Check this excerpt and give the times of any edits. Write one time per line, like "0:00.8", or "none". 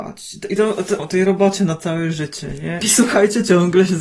0:01.0
0:02.8